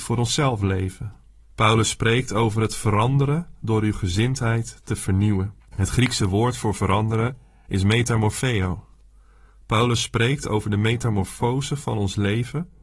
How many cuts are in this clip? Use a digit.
2